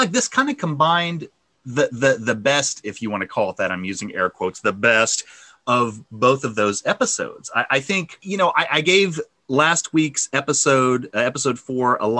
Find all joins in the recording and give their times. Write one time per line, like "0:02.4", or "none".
none